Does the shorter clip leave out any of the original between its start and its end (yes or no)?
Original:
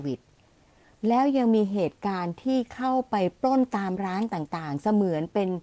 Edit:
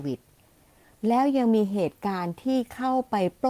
no